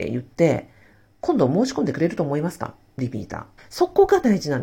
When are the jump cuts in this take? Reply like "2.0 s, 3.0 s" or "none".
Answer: 3.6 s